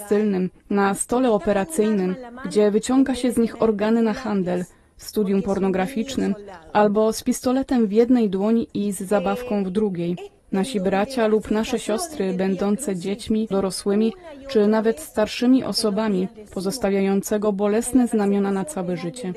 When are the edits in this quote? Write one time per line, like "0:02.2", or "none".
0:10.4
0:13.5
0:16.5